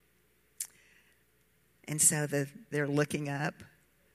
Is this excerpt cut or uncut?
cut